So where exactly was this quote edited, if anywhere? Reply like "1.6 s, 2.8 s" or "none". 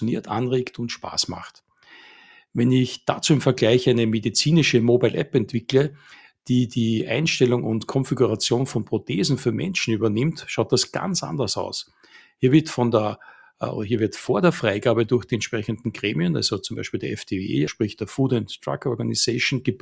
17.7 s